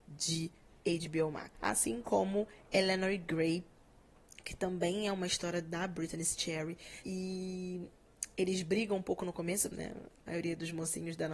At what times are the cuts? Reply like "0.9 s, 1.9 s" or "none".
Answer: 1.6 s, 7.0 s, 9.7 s